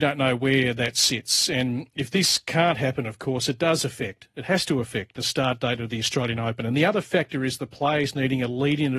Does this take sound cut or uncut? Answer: uncut